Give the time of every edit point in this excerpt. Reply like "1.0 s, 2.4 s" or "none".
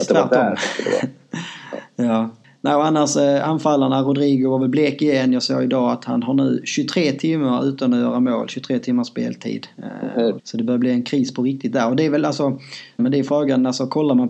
10.4 s, 13.0 s